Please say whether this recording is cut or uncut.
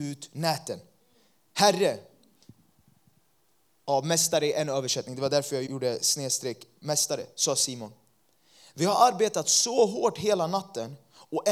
cut